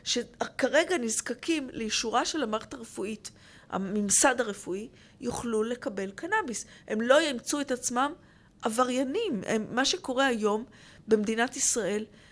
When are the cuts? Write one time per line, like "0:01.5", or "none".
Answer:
none

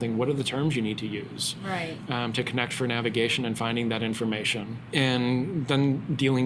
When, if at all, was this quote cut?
0:04.9

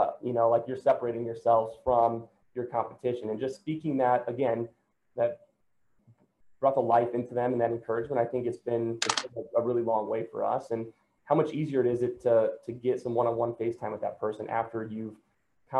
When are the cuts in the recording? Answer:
none

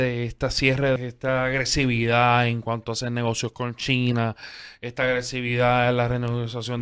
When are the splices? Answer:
0:01.0

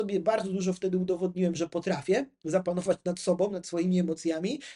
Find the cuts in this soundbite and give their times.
none

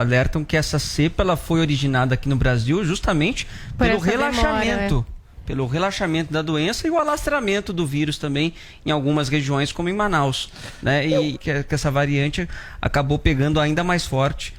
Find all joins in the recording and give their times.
0:11.3

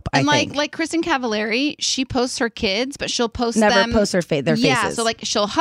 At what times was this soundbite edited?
none

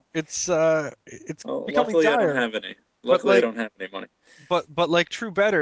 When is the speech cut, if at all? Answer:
none

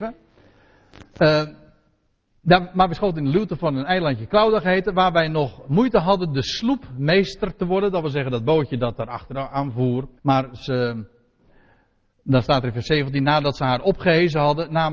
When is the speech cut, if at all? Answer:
0:10.2

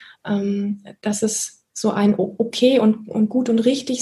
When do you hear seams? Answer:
0:01.7

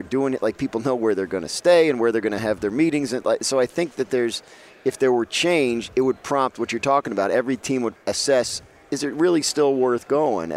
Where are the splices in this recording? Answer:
0:08.0

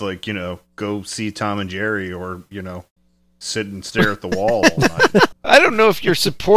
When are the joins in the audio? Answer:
0:05.3

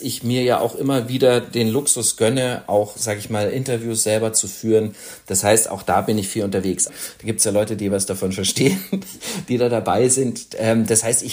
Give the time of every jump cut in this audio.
0:06.9

